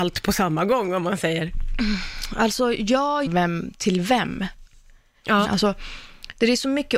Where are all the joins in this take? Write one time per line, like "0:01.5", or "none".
0:03.3
0:05.4